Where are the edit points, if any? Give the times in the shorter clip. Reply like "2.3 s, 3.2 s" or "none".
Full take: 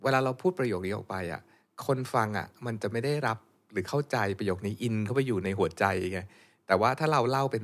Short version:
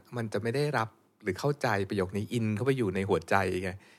none